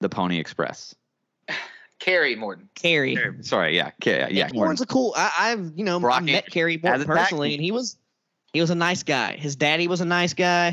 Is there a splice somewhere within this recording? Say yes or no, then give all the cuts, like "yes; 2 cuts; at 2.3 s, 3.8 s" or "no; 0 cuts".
yes; 1 cut; at 4.5 s